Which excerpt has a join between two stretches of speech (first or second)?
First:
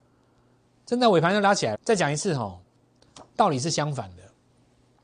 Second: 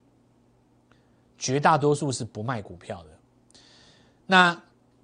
first